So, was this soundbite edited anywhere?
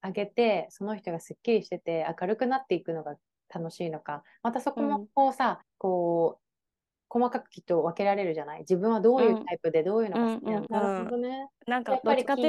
yes; 2 cuts; at 5.6 s, 10.7 s

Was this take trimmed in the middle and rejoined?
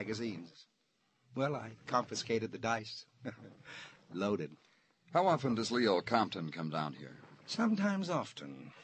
no; 0 cuts

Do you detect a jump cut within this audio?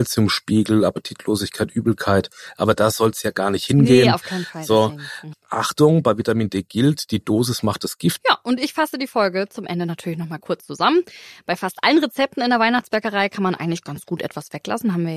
yes; 2 cuts; at 5.3 s, 8.2 s

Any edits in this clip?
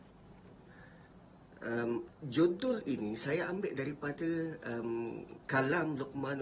yes; 1 cut; at 2.1 s

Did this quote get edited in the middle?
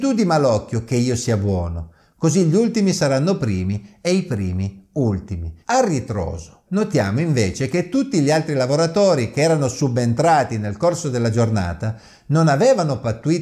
yes; 2 cuts; at 5.6 s, 6.7 s

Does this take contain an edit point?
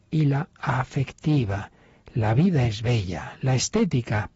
no; 0 cuts

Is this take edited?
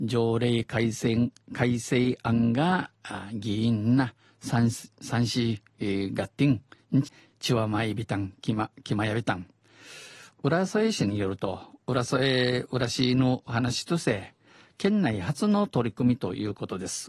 yes; 2 cuts; at 7.0 s, 11.8 s

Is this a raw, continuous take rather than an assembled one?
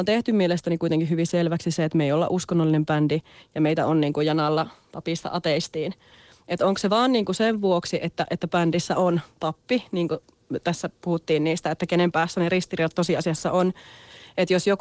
yes; 0 cuts

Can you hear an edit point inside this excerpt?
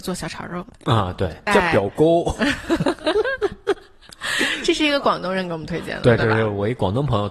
yes; 1 cut; at 1.5 s

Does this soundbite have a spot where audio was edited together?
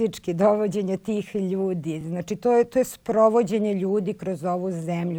no; 0 cuts

